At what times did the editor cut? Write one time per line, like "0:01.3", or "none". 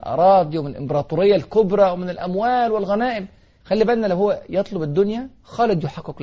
0:03.6